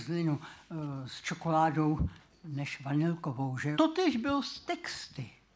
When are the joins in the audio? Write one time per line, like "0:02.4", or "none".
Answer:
0:03.7

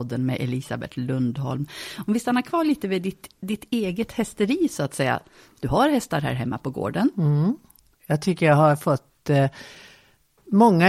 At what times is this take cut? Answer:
0:07.9

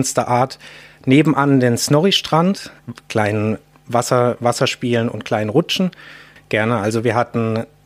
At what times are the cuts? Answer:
0:02.8
0:06.4

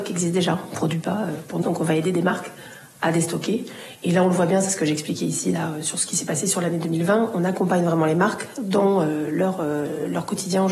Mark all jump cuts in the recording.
0:01.6

